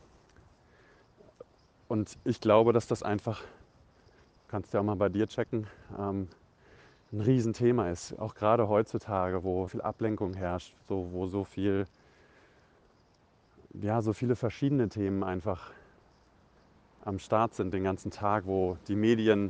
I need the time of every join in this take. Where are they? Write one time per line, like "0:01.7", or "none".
0:09.7